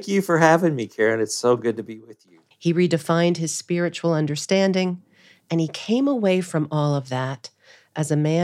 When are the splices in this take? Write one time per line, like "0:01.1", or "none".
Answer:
0:02.5